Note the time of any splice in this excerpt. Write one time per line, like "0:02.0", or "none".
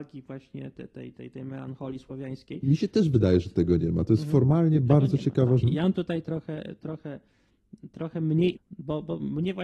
0:05.6
0:08.6